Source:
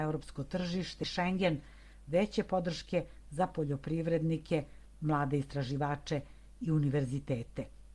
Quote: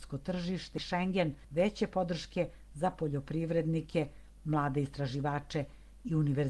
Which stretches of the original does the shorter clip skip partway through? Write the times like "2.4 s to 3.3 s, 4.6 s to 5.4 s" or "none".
1.7 s to 2.0 s

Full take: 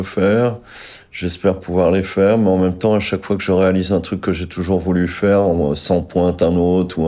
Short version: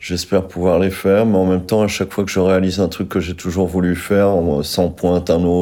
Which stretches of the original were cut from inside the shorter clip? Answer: none

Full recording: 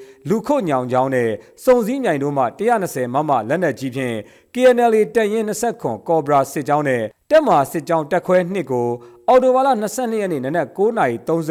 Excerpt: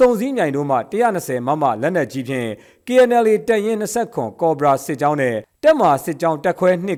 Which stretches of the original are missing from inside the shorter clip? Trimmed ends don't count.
none

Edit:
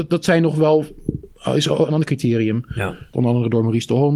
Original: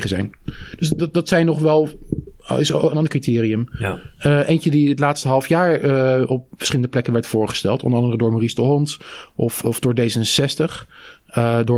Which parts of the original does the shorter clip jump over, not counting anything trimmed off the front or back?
4.2 s to 7.8 s

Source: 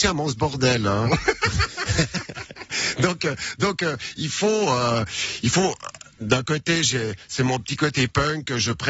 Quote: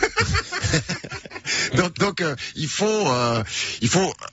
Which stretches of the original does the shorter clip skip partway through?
3.2 s to 3.6 s

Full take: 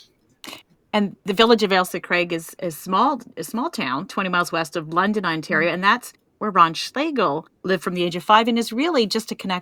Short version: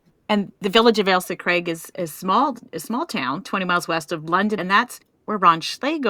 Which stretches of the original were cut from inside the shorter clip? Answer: 5.2 s to 5.7 s

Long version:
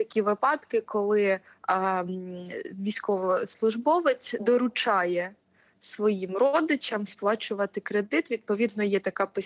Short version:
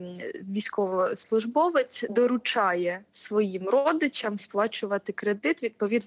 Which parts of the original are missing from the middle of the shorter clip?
5.4 s to 5.8 s

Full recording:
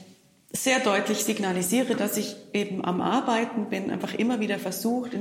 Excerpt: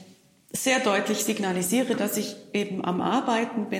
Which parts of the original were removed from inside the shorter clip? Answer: none

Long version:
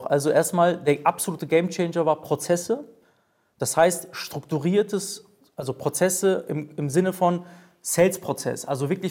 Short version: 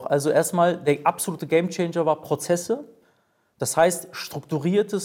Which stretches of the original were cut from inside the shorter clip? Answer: none

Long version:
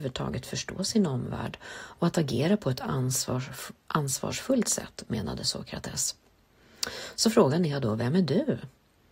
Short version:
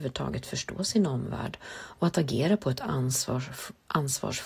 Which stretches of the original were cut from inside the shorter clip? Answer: none

